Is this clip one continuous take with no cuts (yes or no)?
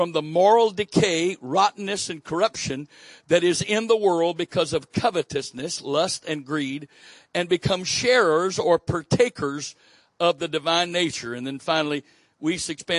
yes